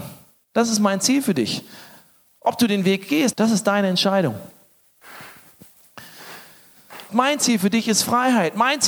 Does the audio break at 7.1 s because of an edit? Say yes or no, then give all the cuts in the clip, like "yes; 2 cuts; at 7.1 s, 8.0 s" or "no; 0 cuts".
yes; 2 cuts; at 3.3 s, 7.1 s